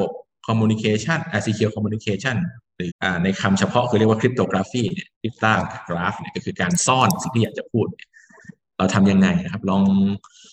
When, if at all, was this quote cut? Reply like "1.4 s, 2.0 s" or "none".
2.9 s, 5.1 s